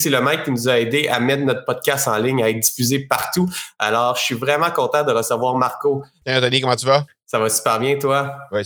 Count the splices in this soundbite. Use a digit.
1